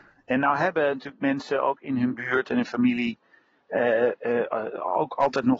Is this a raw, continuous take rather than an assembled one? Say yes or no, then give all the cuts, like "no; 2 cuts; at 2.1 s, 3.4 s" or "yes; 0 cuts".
yes; 0 cuts